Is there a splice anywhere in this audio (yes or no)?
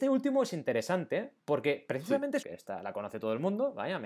yes